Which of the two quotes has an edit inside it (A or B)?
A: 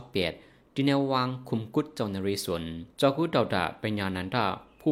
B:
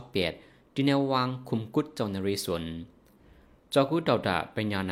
A